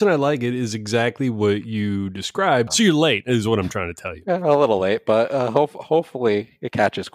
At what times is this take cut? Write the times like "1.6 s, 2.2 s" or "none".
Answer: 2.7 s